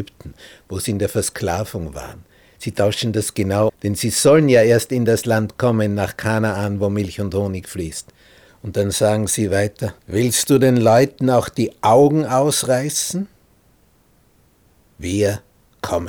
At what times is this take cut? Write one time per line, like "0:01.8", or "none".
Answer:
0:03.7
0:08.5
0:10.0

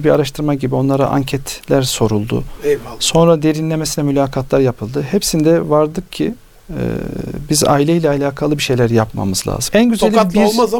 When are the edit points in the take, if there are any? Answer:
0:09.7

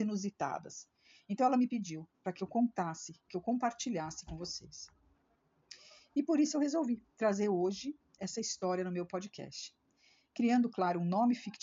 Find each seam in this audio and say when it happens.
none

